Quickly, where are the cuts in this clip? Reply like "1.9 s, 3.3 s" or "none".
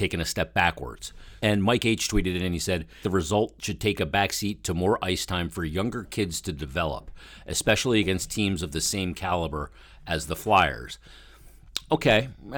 1.4 s, 3.0 s